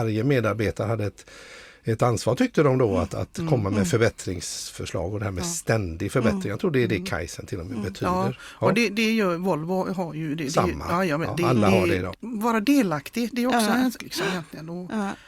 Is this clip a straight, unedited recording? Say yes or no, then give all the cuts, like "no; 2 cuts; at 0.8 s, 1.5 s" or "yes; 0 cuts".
no; 2 cuts; at 12.1 s, 14.0 s